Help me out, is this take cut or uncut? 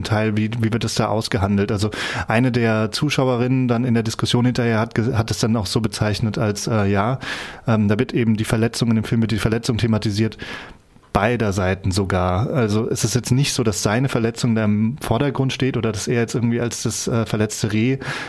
uncut